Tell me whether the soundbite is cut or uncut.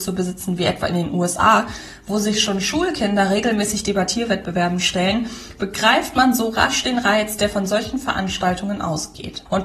uncut